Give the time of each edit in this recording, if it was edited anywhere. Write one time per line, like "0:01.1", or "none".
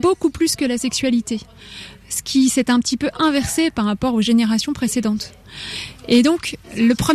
none